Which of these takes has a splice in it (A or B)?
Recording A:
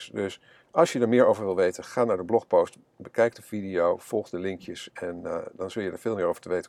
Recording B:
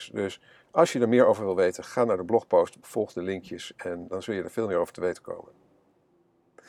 B